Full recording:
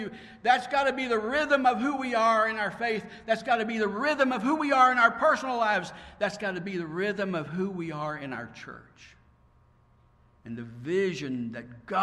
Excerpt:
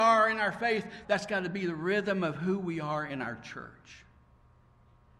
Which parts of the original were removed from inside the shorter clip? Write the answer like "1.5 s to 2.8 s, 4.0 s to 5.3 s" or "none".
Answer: 3.2 s to 6.2 s